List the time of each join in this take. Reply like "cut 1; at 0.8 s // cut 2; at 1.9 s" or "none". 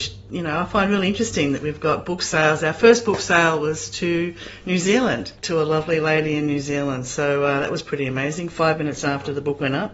cut 1; at 5.4 s